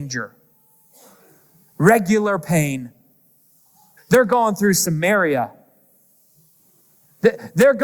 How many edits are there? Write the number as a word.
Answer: one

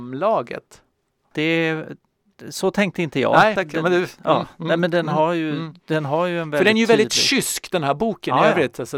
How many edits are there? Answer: one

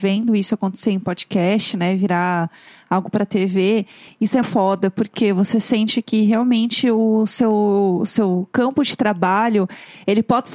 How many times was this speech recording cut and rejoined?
one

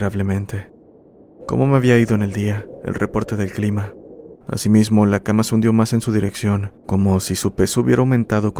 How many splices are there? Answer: two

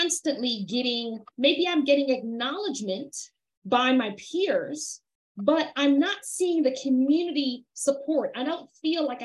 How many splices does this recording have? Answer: one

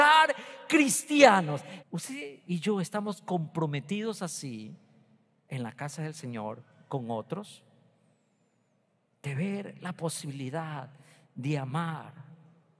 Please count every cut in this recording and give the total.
one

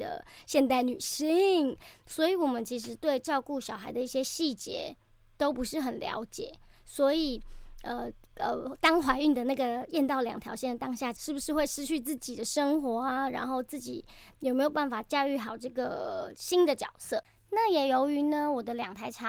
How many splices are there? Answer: one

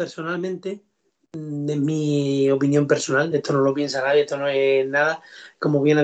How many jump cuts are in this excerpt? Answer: zero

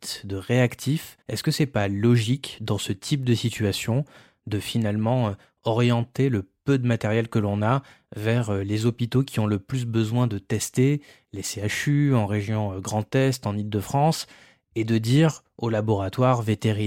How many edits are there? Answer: one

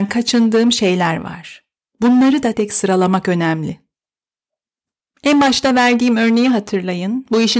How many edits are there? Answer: one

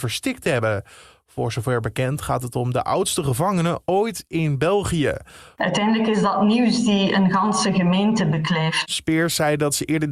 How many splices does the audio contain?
two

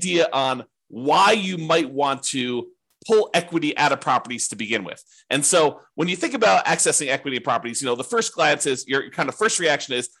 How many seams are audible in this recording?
zero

